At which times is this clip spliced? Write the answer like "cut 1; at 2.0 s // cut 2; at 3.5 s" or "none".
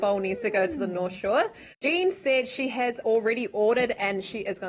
cut 1; at 1.7 s // cut 2; at 3.0 s